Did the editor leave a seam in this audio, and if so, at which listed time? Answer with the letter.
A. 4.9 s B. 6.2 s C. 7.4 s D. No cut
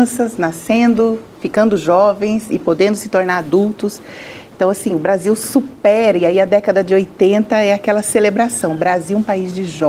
D